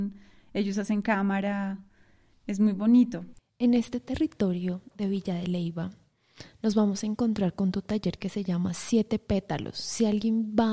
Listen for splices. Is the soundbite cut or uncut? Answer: uncut